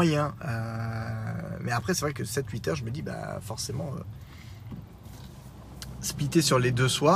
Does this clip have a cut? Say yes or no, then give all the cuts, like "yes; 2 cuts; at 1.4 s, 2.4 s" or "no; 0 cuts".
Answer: no; 0 cuts